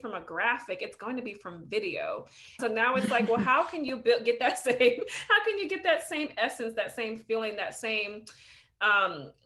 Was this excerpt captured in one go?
no; 1 cut; at 2.6 s

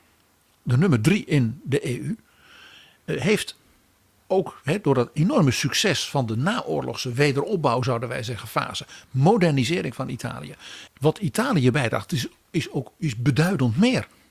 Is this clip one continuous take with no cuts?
no; 1 cut; at 10.9 s

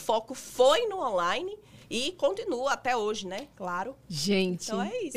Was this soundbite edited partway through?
no; 0 cuts

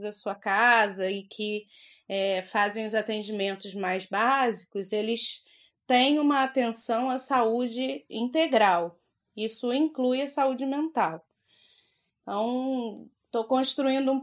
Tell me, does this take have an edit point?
no; 0 cuts

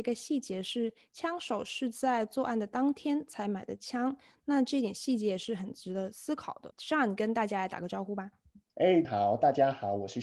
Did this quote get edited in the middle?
yes; 2 cuts; at 6.7 s, 9.0 s

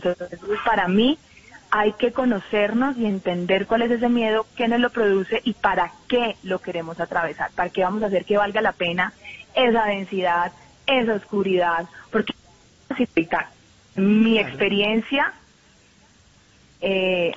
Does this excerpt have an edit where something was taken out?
yes; 1 cut; at 14.0 s

